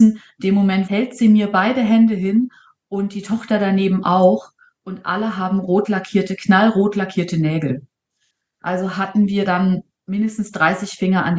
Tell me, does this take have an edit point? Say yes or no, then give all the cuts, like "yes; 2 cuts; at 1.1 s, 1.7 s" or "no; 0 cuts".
no; 0 cuts